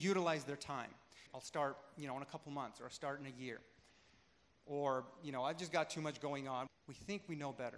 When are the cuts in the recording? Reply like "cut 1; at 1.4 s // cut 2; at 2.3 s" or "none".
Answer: cut 1; at 1.3 s // cut 2; at 6.7 s